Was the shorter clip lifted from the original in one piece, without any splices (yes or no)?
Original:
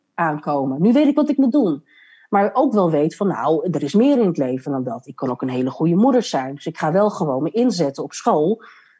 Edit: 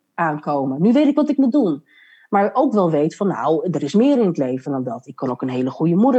yes